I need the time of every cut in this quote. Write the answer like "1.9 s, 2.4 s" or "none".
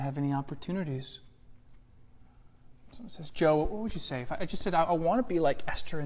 none